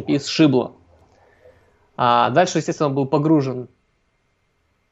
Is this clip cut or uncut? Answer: uncut